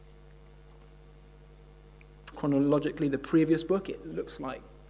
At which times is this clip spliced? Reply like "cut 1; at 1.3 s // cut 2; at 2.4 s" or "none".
cut 1; at 2.3 s